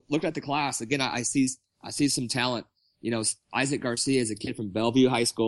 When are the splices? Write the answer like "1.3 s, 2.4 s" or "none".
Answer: none